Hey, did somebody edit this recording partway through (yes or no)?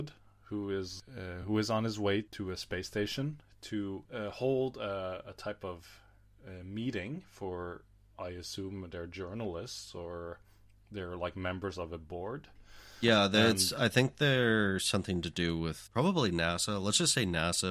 no